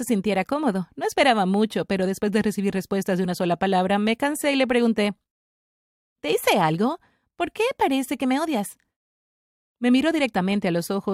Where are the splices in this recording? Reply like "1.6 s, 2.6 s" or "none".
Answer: none